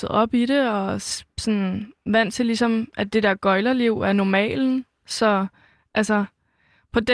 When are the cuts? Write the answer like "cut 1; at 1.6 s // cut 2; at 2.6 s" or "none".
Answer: none